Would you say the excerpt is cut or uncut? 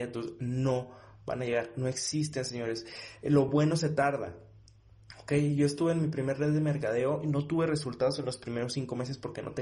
uncut